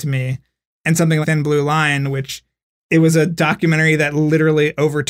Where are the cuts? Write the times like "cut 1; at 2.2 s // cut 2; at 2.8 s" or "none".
cut 1; at 1.2 s